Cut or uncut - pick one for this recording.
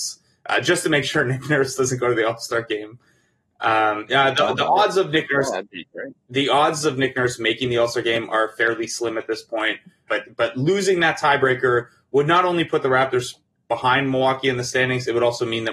cut